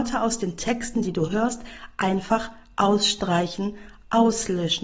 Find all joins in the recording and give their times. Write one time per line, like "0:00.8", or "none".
0:01.0